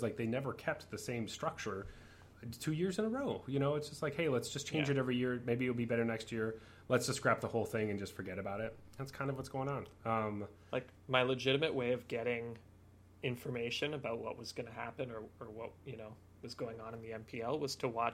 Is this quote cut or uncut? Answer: uncut